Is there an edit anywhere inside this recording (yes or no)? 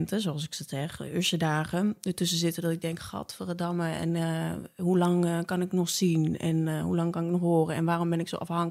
no